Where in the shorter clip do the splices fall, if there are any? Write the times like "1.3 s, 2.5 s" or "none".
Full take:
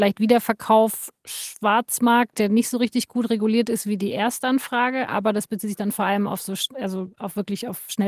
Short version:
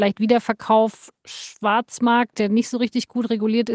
none